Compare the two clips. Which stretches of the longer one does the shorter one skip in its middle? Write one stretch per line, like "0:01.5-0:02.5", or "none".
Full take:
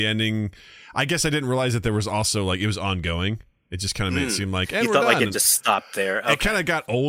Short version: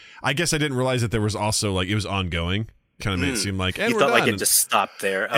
0:03.7-0:03.9